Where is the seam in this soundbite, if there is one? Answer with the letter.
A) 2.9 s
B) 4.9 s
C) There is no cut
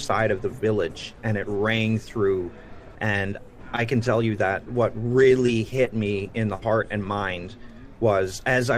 A